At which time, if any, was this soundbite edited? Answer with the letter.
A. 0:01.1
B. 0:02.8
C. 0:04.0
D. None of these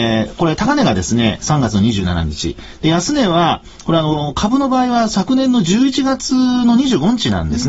D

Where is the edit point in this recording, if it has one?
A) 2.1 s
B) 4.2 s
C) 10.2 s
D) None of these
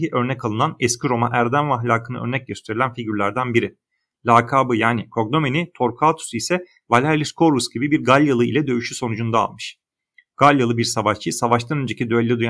D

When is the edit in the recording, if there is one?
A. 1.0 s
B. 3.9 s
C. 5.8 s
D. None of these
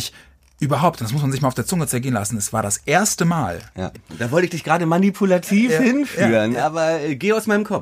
B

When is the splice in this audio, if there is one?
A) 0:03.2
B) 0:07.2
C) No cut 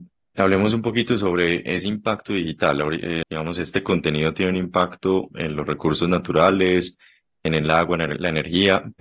A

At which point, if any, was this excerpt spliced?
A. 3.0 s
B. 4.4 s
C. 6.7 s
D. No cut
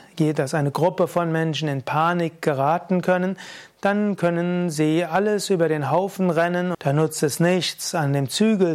C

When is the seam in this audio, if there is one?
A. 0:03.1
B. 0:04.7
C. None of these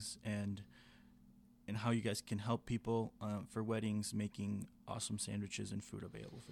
B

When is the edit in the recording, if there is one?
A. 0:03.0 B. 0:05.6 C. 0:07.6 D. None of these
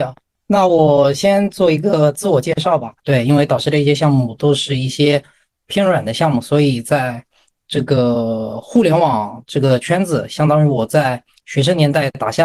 A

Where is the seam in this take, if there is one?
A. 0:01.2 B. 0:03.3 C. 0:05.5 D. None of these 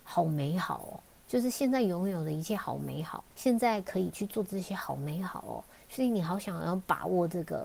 B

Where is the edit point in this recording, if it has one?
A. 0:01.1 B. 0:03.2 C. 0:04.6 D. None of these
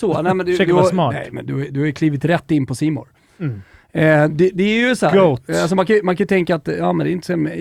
D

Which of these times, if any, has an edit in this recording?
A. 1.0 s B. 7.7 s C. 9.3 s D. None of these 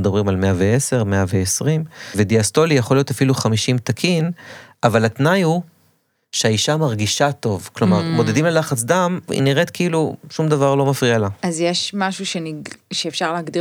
C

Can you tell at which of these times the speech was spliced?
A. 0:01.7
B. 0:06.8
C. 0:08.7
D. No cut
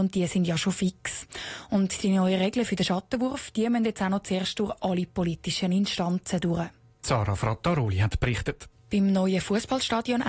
C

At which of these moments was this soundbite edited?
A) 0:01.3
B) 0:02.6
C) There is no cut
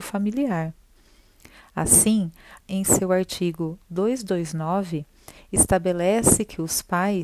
B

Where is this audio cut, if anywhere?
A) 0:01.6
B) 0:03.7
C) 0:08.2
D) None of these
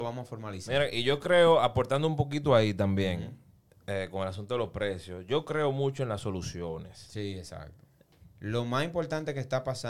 C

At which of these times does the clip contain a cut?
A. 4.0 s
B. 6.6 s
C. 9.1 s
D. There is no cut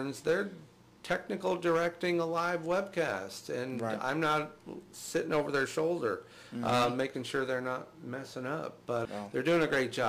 C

